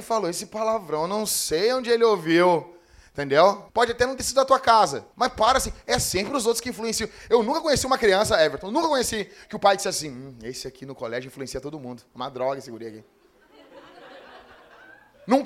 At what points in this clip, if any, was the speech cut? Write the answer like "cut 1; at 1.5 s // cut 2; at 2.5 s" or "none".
cut 1; at 3.7 s // cut 2; at 5.1 s